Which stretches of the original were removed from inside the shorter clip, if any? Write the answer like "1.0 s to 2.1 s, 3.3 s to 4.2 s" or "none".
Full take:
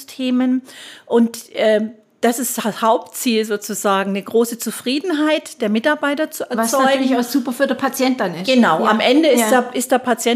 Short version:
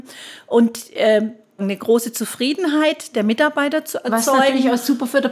2.2 s to 4.0 s